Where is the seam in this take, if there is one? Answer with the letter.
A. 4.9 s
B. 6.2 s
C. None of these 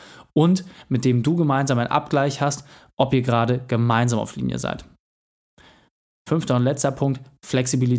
C